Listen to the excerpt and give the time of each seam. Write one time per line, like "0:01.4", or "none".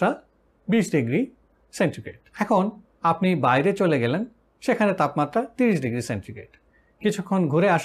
0:02.3

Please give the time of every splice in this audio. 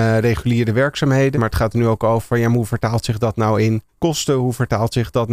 0:01.3
0:03.9

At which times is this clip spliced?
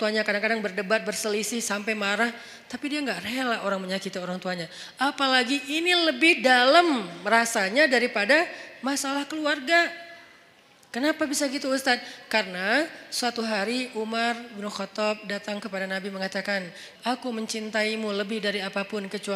0:17.0

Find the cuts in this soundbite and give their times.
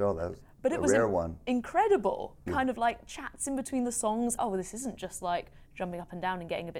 0:02.5
0:04.4

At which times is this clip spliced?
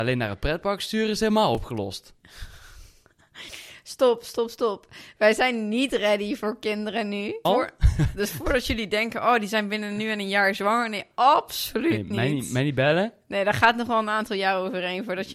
0:07.4

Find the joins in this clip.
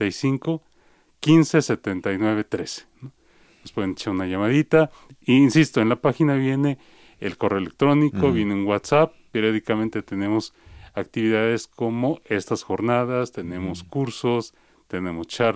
none

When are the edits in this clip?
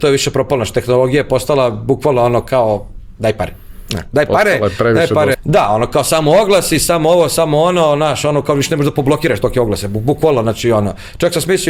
0:05.3

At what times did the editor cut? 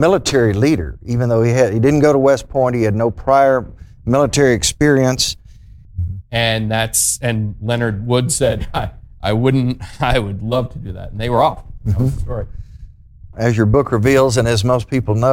0:05.8
0:13.3

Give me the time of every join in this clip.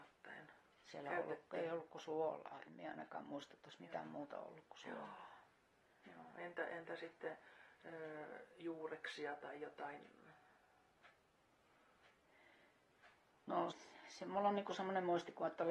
0:13.7

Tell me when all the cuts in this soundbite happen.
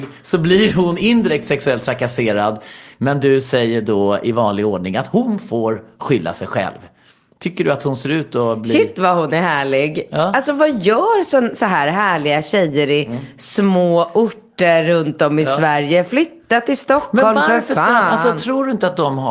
none

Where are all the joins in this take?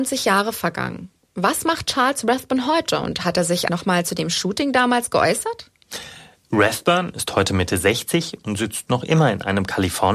0:03.7

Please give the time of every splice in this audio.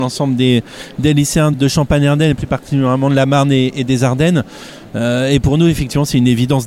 0:01.5

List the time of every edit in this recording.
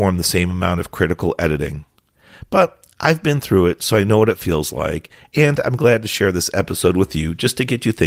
none

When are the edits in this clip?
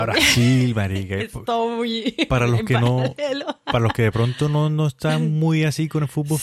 none

